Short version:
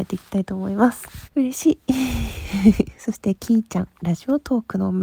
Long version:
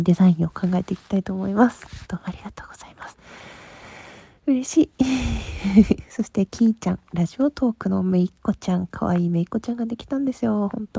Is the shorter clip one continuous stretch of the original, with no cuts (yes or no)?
no